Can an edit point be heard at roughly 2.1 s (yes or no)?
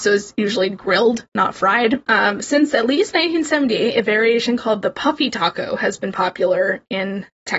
yes